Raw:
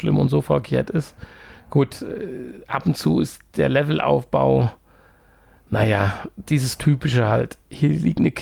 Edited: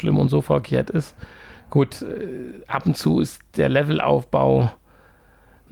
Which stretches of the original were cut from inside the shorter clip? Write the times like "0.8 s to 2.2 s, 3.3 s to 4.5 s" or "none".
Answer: none